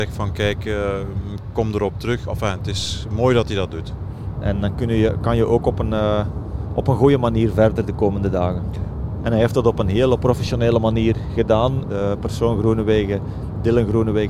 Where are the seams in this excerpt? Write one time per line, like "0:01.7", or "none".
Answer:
0:04.4
0:09.2
0:11.8